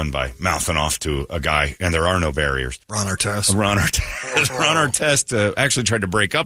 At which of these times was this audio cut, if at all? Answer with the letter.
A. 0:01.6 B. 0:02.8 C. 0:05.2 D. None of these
B